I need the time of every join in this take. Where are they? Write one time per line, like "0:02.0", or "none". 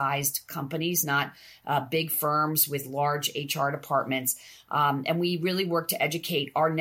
none